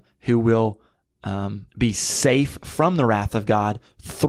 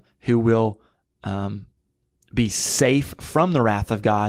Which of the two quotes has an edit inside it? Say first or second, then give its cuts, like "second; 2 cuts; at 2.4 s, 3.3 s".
first; 1 cut; at 1.7 s